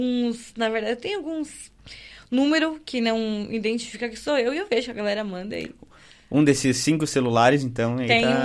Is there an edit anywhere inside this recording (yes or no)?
no